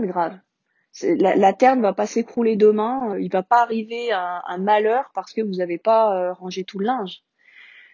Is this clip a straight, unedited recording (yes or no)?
no